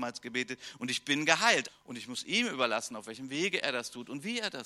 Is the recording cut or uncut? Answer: cut